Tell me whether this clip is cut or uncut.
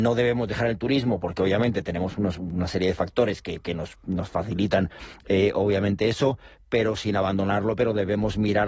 uncut